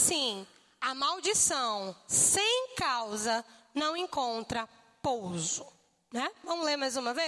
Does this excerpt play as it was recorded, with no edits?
yes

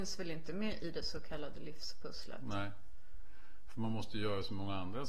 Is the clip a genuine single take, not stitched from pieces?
yes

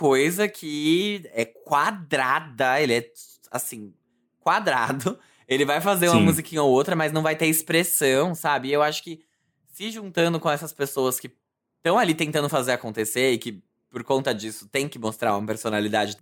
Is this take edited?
no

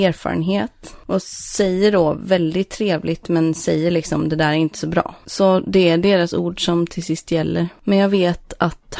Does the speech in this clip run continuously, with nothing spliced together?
no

